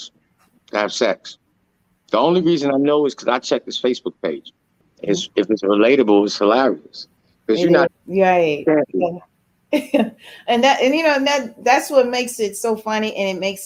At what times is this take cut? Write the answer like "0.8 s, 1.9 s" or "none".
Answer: 4.8 s, 7.9 s